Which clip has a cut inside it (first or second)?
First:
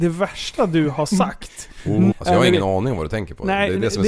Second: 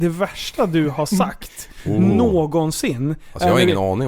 first